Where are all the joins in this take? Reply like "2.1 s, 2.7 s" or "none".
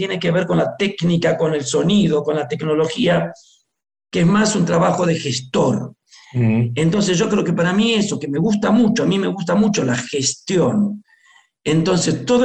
none